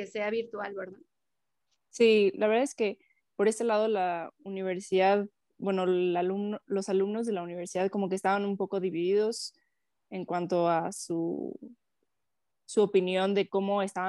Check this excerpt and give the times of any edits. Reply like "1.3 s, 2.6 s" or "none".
none